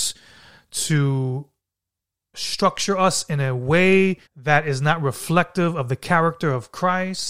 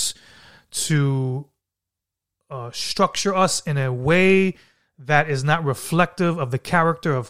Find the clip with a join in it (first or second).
first